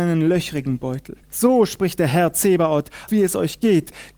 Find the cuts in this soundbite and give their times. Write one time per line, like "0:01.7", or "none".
0:01.2
0:03.1